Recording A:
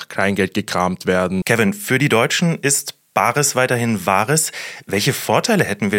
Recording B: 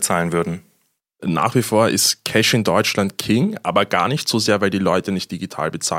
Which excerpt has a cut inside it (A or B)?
A